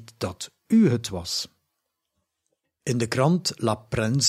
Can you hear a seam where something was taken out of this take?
yes; 1 cut; at 2.6 s

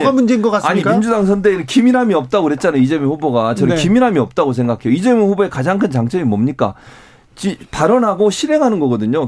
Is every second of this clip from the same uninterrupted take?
yes; 0 cuts

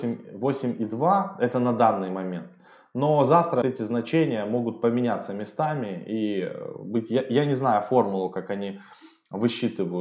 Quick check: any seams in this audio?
yes; 1 cut; at 3.6 s

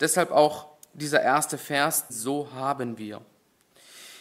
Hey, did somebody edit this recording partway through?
yes; 1 cut; at 2.1 s

